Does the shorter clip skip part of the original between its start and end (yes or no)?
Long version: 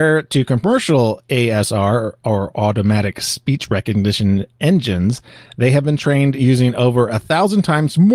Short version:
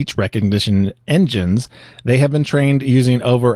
no